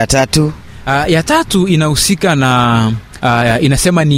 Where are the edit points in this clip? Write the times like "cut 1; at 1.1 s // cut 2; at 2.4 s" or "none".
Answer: none